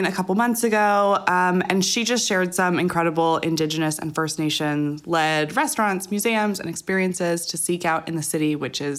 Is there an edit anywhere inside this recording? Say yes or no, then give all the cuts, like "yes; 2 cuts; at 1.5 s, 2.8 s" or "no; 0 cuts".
no; 0 cuts